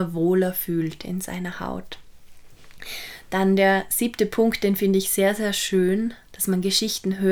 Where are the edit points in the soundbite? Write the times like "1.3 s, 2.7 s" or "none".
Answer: 6.3 s